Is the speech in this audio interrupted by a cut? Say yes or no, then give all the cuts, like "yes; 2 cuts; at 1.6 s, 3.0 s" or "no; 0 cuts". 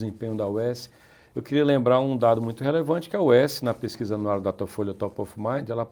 no; 0 cuts